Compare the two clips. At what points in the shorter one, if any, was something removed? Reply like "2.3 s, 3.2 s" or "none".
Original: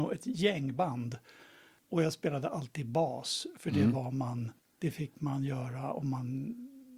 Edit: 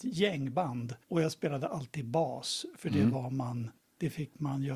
1.0 s